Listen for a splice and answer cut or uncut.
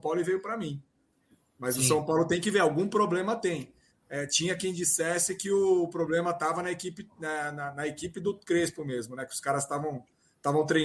uncut